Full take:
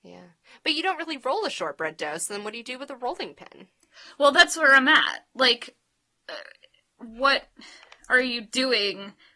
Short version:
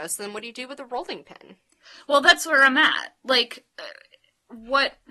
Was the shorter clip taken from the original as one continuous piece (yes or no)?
no